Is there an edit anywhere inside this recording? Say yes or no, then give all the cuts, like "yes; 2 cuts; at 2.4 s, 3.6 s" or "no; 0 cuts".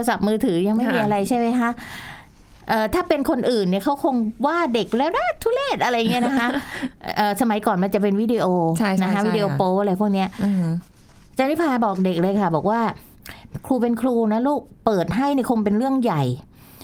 no; 0 cuts